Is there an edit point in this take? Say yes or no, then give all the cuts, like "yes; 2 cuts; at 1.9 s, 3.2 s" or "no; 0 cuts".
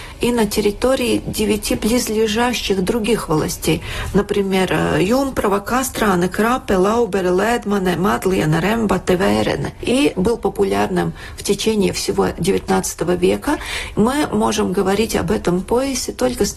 yes; 2 cuts; at 9.8 s, 13.9 s